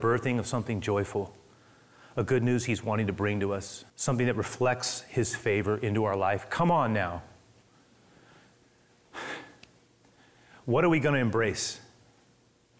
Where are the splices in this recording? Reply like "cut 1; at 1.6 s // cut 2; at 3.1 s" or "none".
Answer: cut 1; at 3.9 s